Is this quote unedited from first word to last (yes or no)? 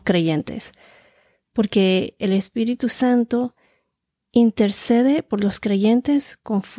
yes